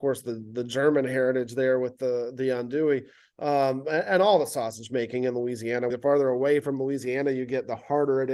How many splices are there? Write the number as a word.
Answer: one